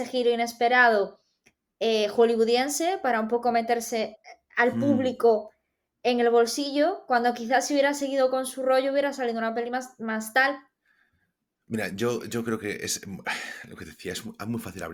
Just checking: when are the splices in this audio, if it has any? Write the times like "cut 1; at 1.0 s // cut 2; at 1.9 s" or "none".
none